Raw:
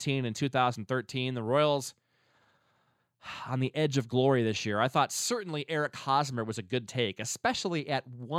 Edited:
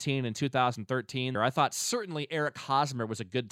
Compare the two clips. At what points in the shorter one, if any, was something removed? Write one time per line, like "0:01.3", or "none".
0:01.3